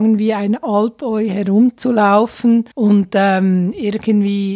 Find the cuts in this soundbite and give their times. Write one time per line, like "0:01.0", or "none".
0:02.7